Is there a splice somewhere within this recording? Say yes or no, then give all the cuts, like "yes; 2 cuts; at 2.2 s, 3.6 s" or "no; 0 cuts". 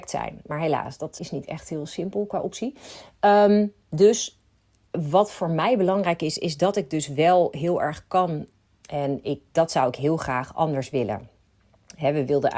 yes; 2 cuts; at 1.2 s, 8.7 s